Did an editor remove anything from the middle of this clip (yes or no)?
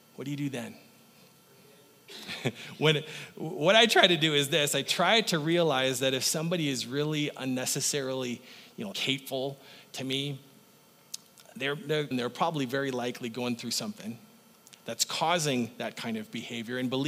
yes